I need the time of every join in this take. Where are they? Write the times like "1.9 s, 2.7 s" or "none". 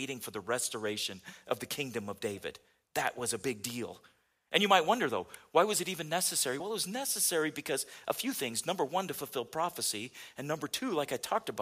none